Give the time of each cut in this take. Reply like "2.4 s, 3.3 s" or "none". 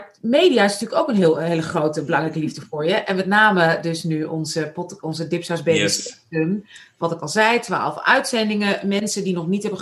none

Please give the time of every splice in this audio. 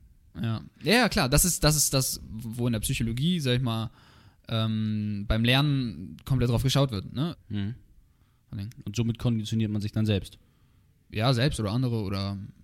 7.3 s

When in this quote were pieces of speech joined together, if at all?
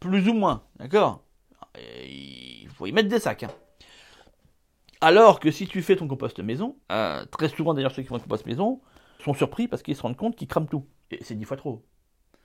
6.8 s, 9.2 s, 11.0 s

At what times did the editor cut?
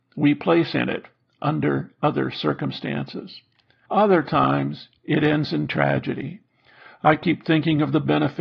3.9 s

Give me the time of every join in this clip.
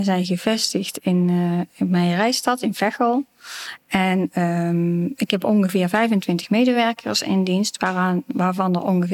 none

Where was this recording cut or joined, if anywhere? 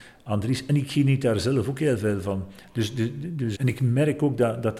3.5 s

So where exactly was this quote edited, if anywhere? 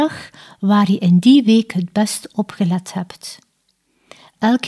none

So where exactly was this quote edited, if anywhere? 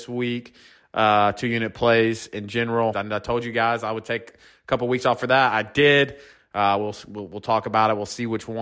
2.9 s, 6.4 s

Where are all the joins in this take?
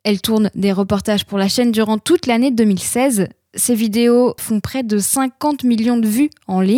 4.4 s

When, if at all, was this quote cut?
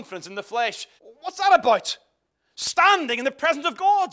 1.0 s

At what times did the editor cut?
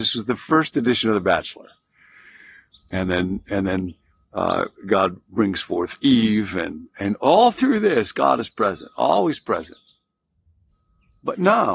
none

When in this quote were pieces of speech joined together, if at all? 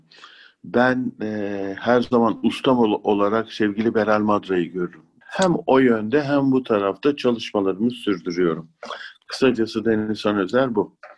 5.2 s

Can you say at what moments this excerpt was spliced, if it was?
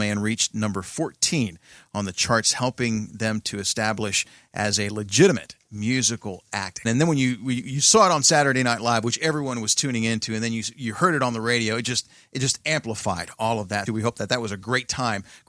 6.8 s, 13.9 s

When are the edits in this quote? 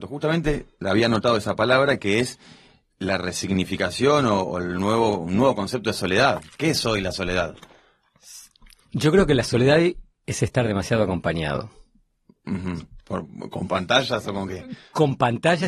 none

